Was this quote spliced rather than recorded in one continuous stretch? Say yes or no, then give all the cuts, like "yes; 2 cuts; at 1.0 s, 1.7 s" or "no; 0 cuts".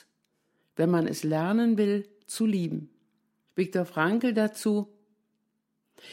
yes; 1 cut; at 3.5 s